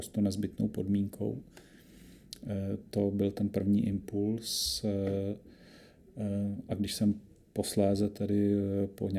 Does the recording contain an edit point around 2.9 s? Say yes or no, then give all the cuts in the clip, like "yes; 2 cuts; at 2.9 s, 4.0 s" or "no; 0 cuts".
no; 0 cuts